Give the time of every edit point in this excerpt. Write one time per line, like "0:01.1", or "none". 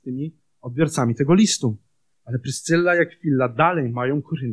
0:02.1